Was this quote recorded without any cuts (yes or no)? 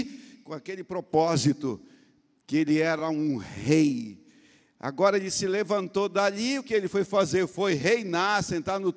yes